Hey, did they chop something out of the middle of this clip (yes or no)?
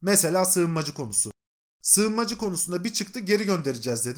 no